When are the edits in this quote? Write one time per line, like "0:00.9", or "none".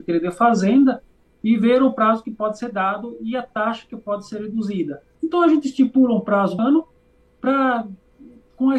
0:05.1
0:06.6